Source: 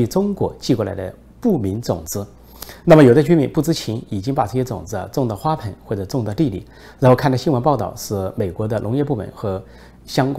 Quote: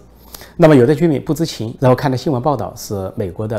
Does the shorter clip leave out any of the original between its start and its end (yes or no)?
yes